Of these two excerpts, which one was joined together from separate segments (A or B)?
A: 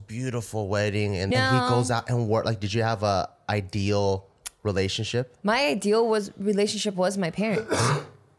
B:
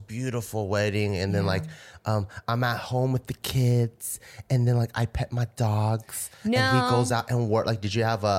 A